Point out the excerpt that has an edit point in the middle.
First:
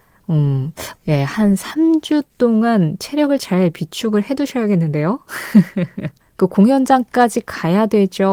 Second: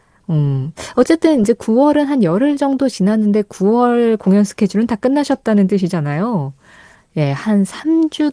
first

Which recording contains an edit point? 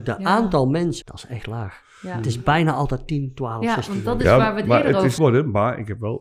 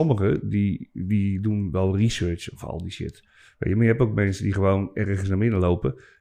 first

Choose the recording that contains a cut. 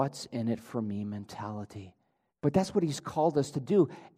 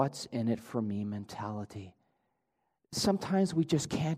first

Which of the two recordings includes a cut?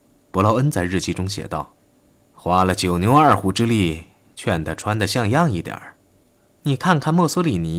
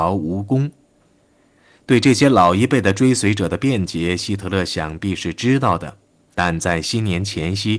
first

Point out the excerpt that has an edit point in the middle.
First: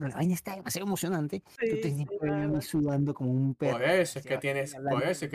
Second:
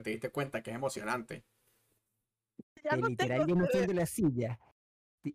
second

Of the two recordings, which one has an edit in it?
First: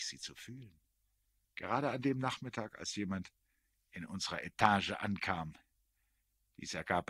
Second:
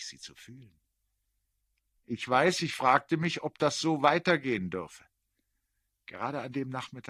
first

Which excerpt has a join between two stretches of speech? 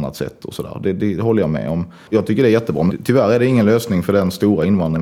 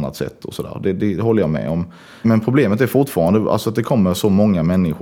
first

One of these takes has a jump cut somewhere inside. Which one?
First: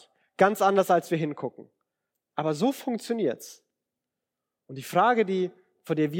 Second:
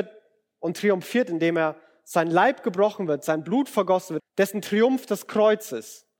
second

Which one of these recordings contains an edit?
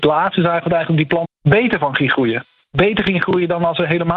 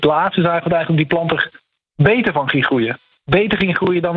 first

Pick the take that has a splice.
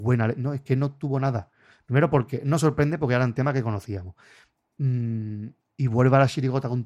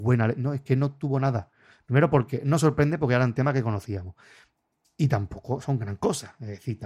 first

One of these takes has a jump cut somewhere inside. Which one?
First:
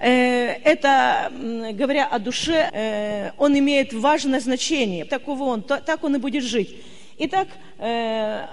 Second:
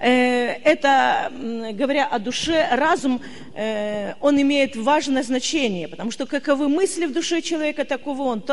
first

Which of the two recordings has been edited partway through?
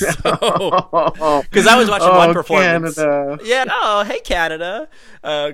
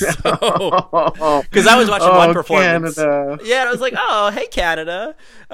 first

